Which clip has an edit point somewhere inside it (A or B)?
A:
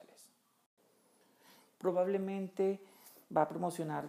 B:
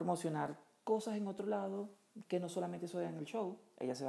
A